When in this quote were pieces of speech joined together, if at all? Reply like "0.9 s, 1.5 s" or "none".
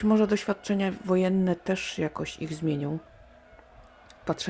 none